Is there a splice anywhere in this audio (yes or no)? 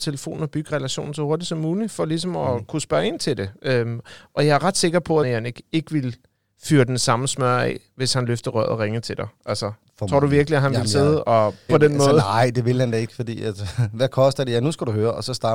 yes